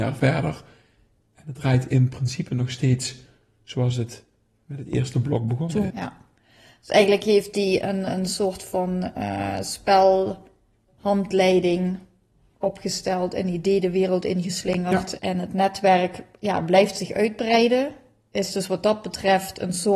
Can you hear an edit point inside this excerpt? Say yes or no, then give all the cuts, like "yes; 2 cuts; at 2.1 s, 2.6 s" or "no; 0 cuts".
yes; 3 cuts; at 5.9 s, 10.9 s, 15.2 s